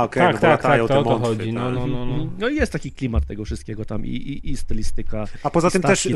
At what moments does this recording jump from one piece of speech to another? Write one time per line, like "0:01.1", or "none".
none